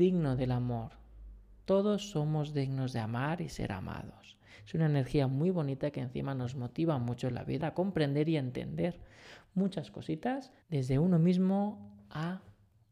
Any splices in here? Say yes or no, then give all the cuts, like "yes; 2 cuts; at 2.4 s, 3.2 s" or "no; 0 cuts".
yes; 2 cuts; at 7.6 s, 10.6 s